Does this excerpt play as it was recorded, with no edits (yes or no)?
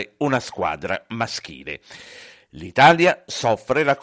yes